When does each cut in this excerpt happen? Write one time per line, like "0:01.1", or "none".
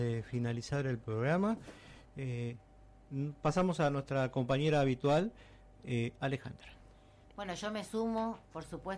0:02.0